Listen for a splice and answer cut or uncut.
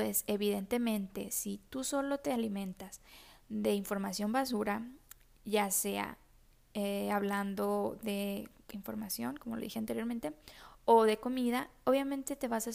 uncut